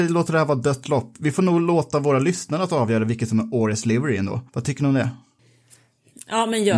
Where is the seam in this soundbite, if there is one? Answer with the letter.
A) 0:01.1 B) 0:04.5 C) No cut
B